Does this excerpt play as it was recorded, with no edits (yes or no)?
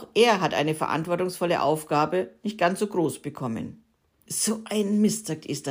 no